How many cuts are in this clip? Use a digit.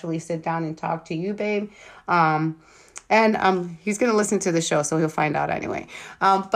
0